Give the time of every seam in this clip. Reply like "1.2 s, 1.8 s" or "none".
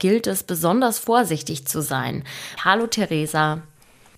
2.6 s